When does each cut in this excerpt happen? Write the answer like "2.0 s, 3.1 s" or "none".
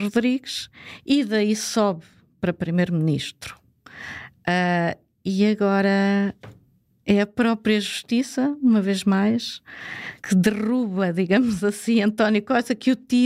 none